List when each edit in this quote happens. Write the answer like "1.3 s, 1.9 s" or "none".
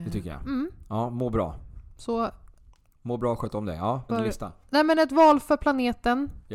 4.1 s